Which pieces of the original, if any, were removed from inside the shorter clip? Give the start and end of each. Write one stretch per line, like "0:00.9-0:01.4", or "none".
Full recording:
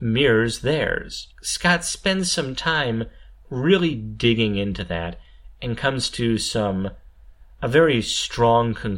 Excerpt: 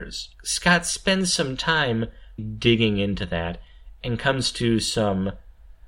0:03.4-0:04.0